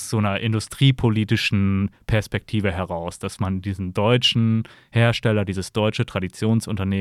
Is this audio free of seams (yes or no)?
yes